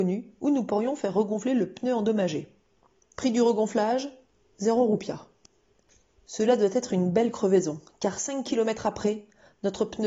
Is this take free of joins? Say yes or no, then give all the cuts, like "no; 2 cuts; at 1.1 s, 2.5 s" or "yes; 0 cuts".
no; 1 cut; at 3.1 s